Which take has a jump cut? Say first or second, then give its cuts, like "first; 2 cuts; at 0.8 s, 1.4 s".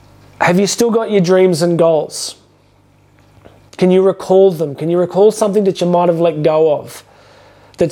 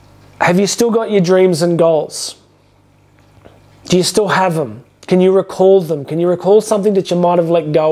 first; 1 cut; at 3.7 s